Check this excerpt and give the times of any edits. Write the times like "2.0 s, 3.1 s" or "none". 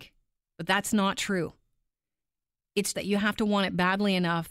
2.9 s